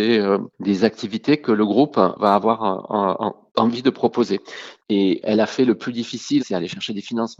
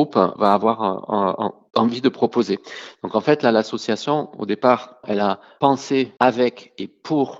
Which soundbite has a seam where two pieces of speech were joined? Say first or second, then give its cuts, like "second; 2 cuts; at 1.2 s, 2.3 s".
first; 2 cuts; at 4.8 s, 6.4 s